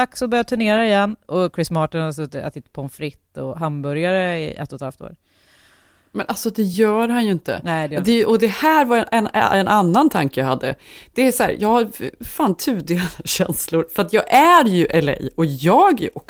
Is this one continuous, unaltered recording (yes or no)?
yes